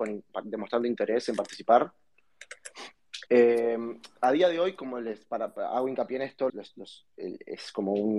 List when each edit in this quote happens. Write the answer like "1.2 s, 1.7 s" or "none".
3.3 s, 6.5 s